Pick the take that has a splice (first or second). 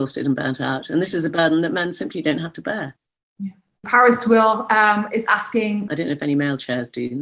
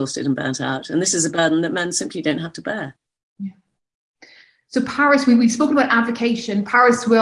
first